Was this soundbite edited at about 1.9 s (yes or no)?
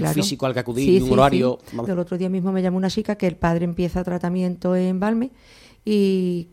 yes